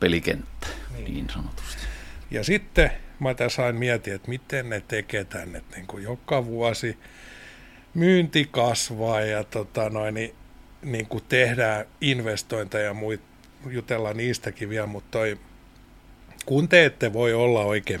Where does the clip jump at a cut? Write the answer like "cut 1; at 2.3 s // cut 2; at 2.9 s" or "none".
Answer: cut 1; at 2.2 s